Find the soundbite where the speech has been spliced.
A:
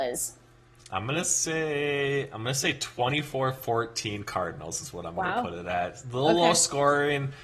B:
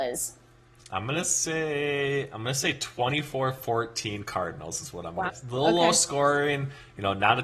B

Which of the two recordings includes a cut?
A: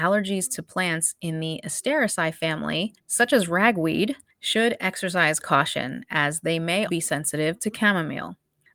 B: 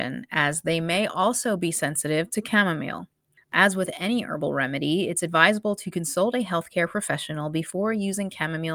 A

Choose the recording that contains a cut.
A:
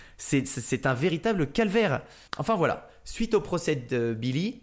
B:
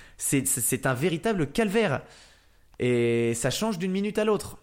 A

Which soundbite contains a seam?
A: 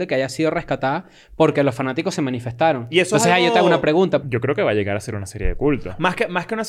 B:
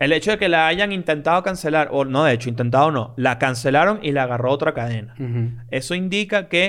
A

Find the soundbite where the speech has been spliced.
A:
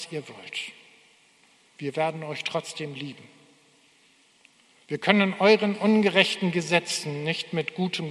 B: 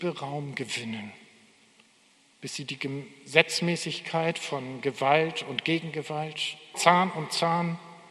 B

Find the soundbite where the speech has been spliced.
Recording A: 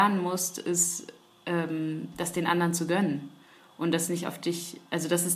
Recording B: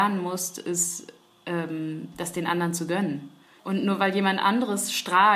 B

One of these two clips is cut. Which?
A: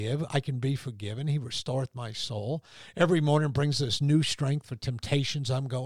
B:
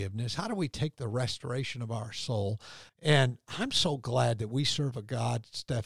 B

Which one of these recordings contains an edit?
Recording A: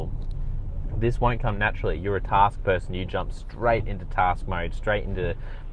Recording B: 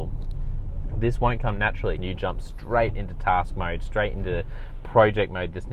B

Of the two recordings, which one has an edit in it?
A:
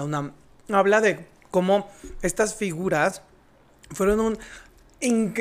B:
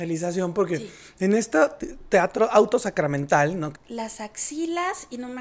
B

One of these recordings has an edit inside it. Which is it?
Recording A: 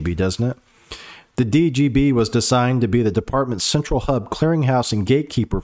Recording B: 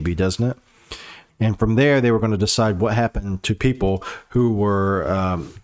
B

